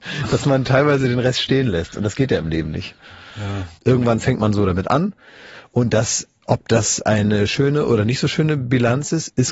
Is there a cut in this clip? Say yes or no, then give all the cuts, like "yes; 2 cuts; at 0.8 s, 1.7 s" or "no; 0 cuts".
yes; 1 cut; at 3.8 s